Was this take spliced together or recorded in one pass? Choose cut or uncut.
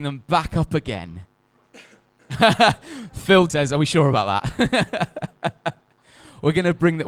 cut